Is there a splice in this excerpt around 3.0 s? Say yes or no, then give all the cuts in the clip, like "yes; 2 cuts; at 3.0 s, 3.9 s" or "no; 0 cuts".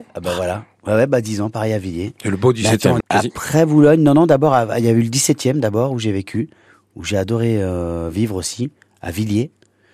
yes; 1 cut; at 3.0 s